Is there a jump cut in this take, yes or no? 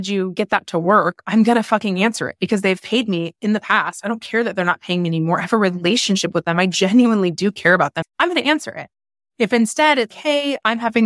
yes